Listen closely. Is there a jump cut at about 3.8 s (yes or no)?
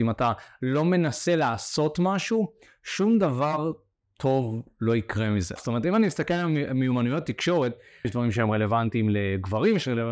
no